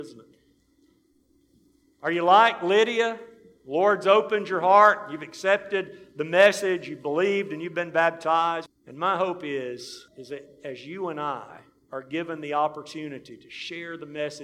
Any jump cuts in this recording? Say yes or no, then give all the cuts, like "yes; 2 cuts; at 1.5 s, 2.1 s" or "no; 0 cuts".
yes; 2 cuts; at 8.7 s, 10.1 s